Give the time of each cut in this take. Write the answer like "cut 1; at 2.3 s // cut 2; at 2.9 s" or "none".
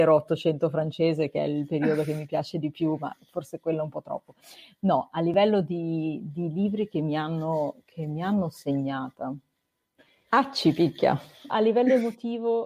cut 1; at 10.3 s // cut 2; at 11.5 s

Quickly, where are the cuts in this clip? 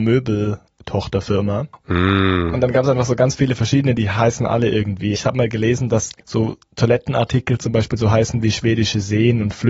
cut 1; at 1.8 s // cut 2; at 5.1 s // cut 3; at 6.2 s

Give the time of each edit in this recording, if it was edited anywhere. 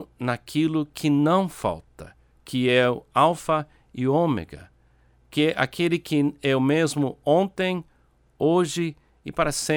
cut 1; at 2.3 s

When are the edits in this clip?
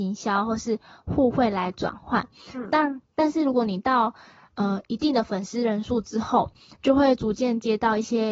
none

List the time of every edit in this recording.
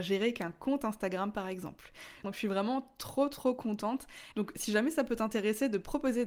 cut 1; at 2.2 s // cut 2; at 4.3 s

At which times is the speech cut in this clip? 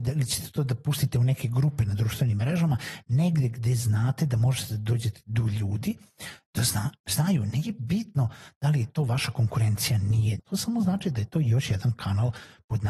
cut 1; at 10.4 s

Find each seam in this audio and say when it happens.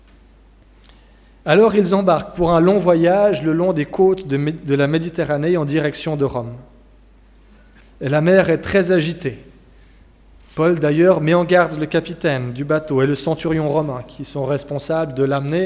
cut 1; at 7.8 s

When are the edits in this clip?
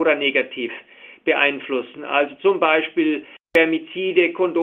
none

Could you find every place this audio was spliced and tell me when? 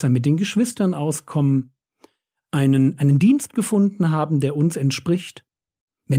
none

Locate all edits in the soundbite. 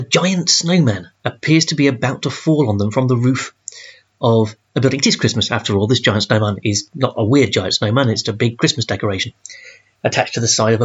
cut 1; at 1.1 s // cut 2; at 8.2 s

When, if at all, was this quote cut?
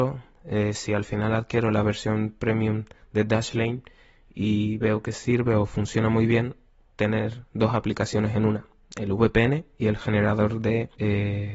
cut 1; at 6.9 s

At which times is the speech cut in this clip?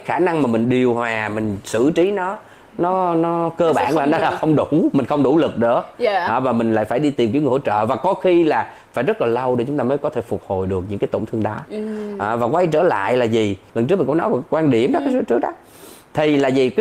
none

